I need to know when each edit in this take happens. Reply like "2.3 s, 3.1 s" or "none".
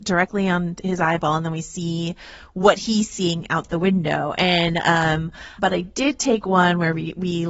5.6 s